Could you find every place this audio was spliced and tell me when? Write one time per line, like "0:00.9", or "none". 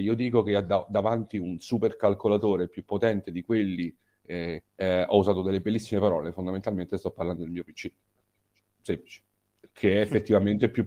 0:04.6